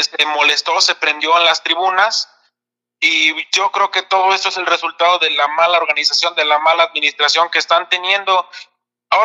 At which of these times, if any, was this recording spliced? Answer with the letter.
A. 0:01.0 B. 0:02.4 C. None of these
C